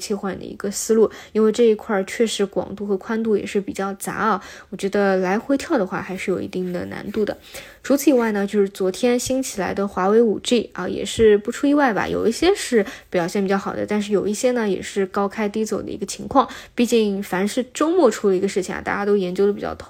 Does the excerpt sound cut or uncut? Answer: uncut